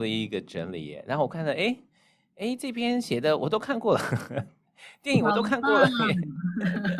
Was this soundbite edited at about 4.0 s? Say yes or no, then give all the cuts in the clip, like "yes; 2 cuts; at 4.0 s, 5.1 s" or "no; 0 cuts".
no; 0 cuts